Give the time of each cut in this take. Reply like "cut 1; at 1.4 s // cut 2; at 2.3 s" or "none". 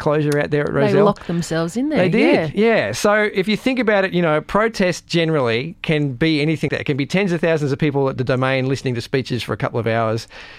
cut 1; at 6.7 s